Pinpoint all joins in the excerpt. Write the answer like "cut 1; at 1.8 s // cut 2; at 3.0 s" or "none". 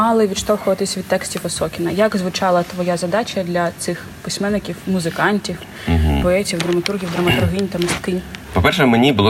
none